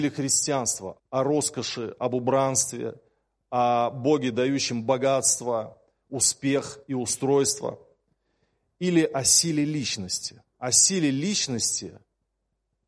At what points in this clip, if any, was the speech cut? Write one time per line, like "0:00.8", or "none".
0:01.0
0:10.5